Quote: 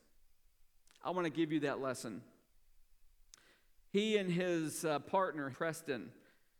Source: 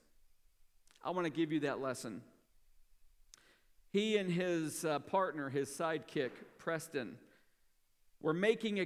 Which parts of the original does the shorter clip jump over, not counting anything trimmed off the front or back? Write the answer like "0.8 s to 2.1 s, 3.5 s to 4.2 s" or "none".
5.5 s to 6.6 s